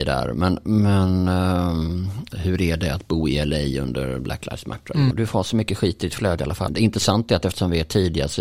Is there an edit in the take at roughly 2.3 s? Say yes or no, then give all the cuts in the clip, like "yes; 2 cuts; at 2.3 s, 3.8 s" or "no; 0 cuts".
yes; 3 cuts; at 2.3 s, 5.1 s, 6.7 s